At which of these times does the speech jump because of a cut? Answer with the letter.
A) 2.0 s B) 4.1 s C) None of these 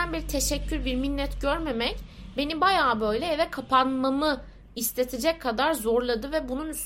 C